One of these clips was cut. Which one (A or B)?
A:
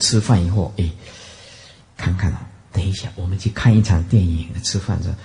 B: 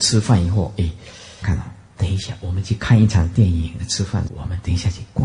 B